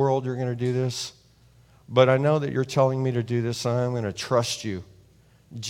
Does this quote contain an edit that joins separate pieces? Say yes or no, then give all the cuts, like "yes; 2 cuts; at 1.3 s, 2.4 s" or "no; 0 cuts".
no; 0 cuts